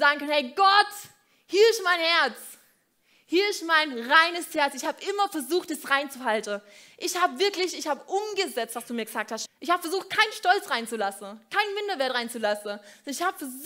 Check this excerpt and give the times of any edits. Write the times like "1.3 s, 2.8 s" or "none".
9.5 s